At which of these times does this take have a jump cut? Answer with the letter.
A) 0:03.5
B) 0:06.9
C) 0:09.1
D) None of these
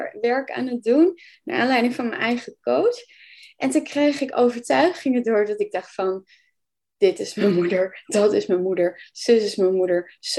D